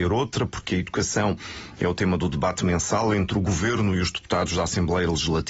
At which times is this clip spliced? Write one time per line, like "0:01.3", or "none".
none